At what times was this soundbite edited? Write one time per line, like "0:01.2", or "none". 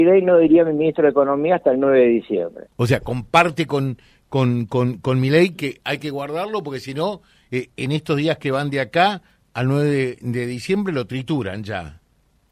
0:02.7